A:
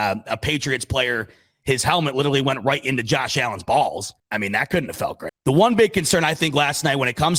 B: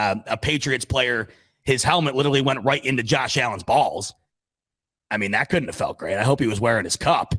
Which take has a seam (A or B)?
A